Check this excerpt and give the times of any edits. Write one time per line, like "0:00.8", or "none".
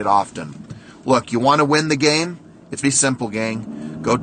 0:02.8